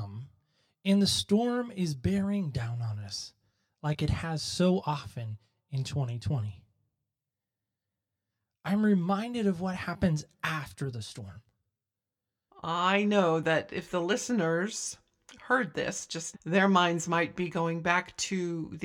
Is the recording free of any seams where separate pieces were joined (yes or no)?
no